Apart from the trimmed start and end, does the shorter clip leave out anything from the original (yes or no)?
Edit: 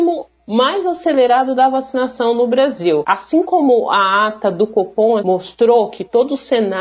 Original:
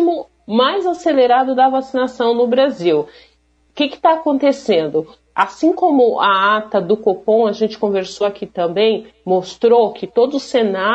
yes